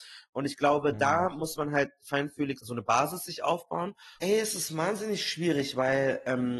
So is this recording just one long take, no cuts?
no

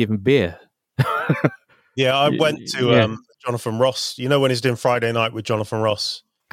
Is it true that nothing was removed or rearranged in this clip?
yes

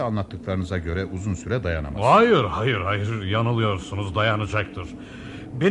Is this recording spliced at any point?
no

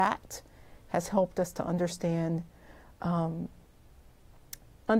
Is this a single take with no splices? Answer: yes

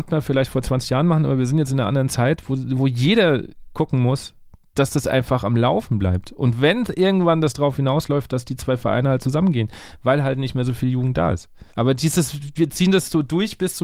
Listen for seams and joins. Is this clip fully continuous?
no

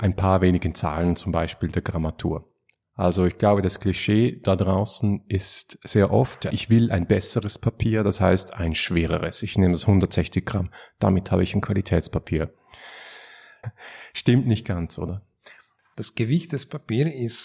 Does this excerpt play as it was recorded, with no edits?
no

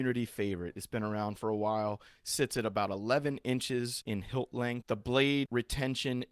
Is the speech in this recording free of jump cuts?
yes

